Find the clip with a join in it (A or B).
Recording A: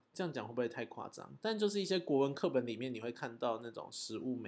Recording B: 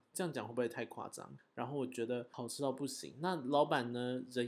B